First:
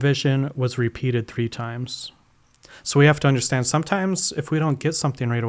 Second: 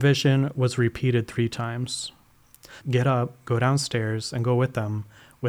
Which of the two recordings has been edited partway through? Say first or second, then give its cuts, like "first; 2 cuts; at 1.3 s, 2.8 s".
second; 1 cut; at 2.8 s